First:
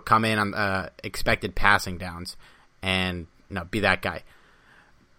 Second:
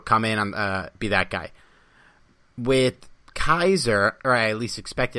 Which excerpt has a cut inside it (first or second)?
second